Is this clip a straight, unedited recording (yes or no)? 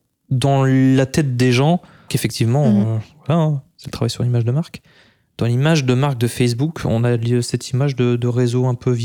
no